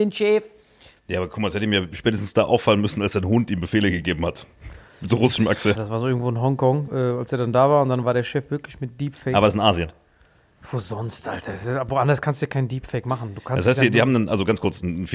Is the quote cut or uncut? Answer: cut